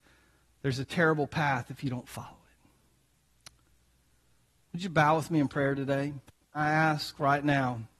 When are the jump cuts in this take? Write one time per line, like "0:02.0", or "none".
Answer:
0:06.4